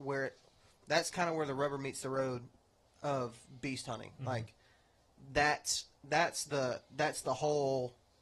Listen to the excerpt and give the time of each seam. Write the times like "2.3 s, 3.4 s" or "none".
none